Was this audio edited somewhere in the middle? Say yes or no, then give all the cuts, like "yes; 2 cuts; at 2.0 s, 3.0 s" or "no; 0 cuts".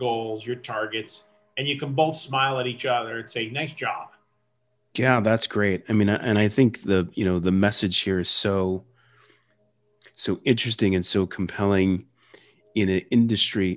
yes; 1 cut; at 4.9 s